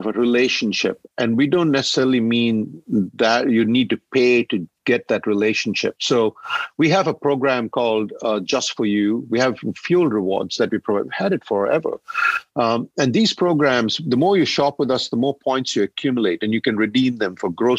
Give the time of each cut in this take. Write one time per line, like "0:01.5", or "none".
none